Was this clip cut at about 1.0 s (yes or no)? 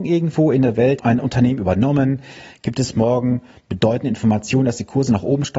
yes